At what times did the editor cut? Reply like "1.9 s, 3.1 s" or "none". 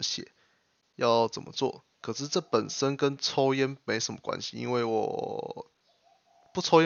1.9 s